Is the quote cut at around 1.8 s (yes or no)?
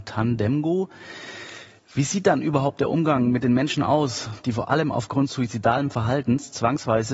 no